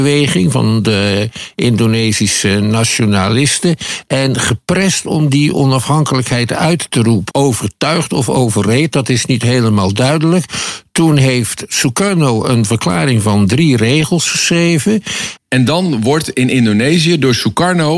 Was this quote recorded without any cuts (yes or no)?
no